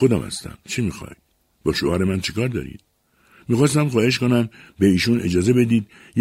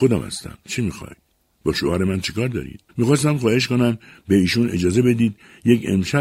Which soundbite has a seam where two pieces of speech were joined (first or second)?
second